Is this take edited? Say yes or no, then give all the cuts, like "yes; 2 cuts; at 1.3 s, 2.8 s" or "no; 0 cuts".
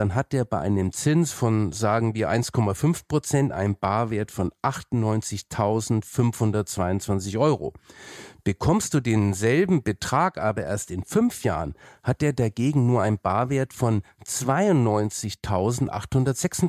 no; 0 cuts